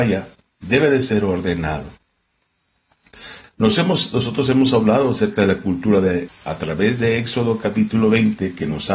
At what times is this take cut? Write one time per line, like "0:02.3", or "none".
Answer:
0:03.4
0:06.3